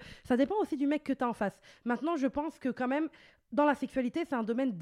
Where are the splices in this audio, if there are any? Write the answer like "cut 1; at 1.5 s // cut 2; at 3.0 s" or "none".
none